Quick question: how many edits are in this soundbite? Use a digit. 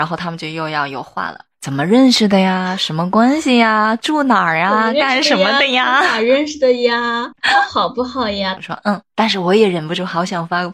1